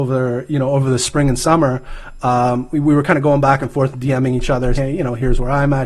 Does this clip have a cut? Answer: yes; 1 cut; at 4.7 s

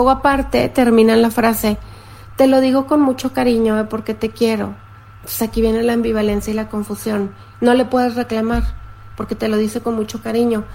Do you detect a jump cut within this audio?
no; 0 cuts

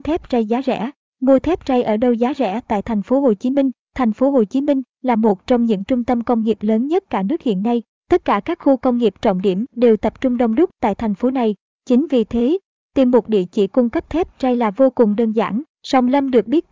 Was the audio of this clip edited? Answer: yes; 1 cut; at 15.7 s

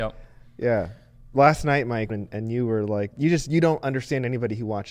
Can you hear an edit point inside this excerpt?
yes; 2 cuts; at 2.1 s, 3.1 s

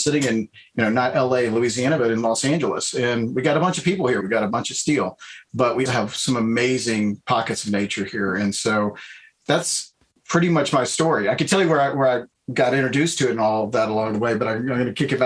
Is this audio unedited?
no; 2 cuts; at 4.2 s, 5.9 s

